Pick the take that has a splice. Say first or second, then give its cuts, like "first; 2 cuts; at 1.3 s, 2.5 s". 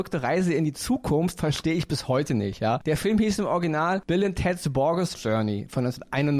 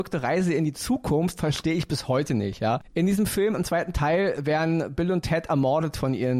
second; 1 cut; at 2.8 s